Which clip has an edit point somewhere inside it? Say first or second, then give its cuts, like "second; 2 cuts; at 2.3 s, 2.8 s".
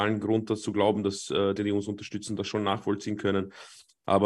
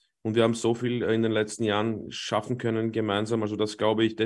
first; 1 cut; at 1.6 s